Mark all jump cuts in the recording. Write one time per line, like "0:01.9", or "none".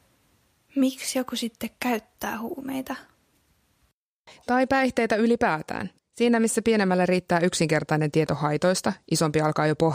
0:06.0